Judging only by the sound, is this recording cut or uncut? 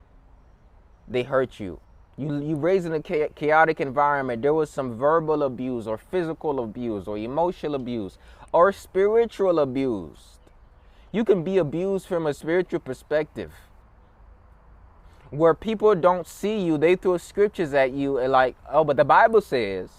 uncut